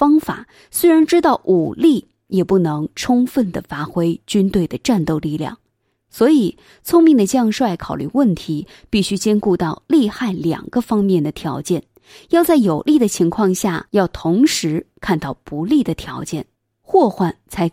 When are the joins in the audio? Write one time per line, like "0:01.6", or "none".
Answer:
none